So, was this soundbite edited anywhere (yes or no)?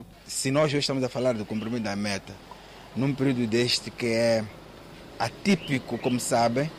no